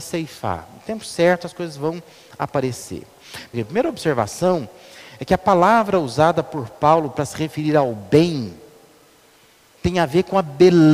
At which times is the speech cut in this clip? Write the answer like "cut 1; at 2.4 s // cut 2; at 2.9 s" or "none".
cut 1; at 3.5 s // cut 2; at 9.7 s